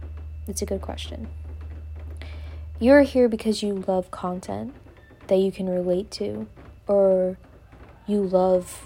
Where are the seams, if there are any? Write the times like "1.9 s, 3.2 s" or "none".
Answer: 6.8 s